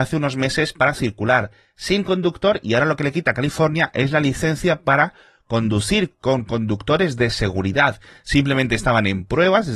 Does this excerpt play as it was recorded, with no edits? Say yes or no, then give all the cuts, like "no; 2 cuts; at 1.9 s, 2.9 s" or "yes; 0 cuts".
yes; 0 cuts